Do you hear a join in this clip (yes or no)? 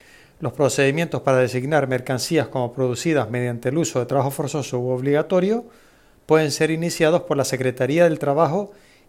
no